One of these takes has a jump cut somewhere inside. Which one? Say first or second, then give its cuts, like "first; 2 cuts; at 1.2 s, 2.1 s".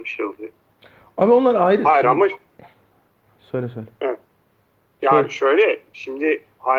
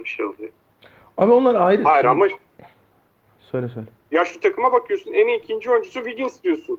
second; 1 cut; at 4.0 s